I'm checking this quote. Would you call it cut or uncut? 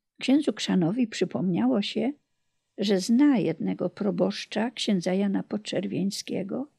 uncut